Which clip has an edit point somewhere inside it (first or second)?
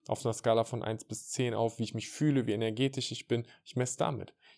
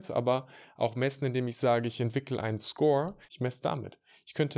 second